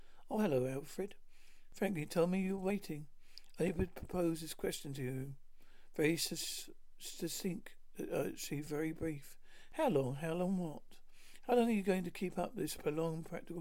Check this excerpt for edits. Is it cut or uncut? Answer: uncut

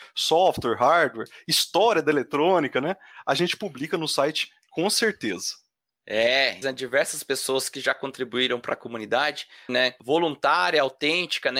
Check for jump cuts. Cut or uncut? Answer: cut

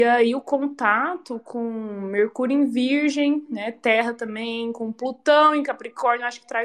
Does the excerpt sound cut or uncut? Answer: uncut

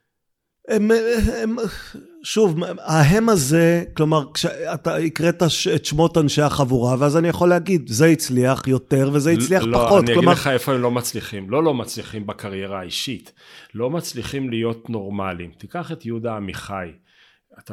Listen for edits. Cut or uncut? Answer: uncut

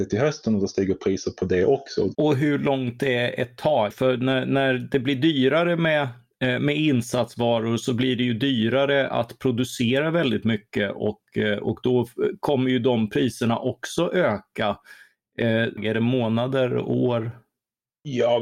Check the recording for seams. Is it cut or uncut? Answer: cut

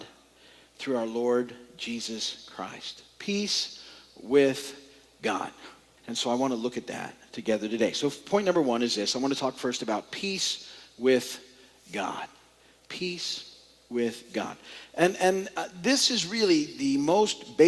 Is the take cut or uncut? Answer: cut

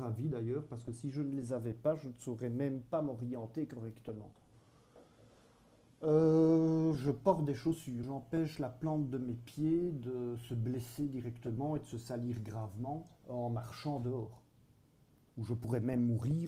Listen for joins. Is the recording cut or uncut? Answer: cut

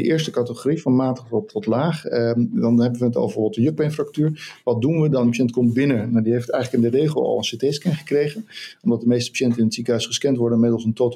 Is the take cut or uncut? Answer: uncut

